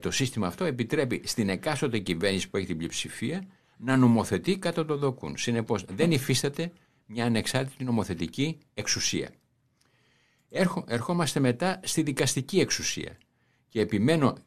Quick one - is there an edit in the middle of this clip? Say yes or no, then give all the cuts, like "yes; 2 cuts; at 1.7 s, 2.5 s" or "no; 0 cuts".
no; 0 cuts